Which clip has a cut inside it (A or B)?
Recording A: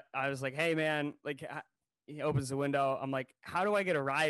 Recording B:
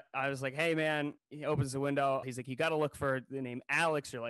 B